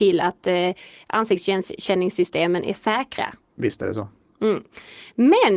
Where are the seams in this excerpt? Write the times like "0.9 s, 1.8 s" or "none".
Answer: 3.5 s